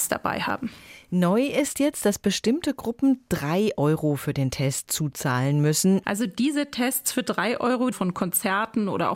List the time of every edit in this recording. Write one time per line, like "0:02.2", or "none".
0:06.0
0:07.9